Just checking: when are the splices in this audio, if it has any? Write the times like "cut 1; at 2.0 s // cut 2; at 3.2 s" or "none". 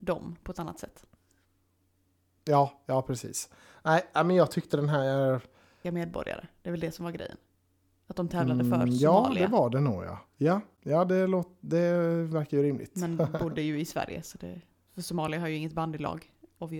cut 1; at 5.8 s